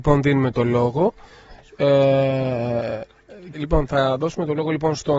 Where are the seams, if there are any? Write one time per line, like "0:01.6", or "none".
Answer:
0:03.5